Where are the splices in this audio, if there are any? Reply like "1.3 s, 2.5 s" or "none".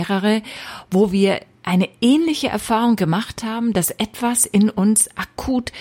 none

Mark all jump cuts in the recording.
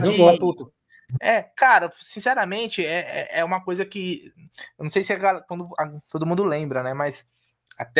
none

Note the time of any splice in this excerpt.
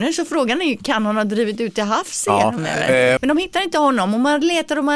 3.2 s

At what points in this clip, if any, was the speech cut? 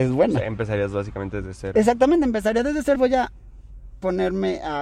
3.0 s

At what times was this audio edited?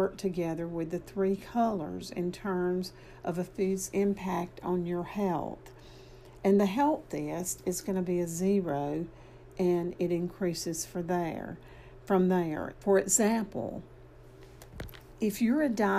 12.7 s

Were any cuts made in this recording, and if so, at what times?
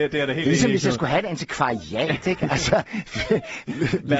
none

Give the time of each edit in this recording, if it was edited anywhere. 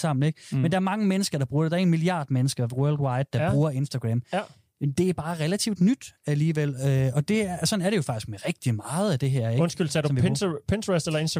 none

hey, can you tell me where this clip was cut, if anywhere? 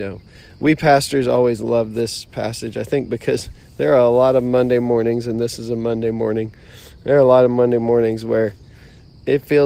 none

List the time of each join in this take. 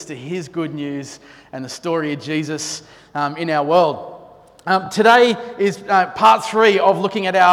none

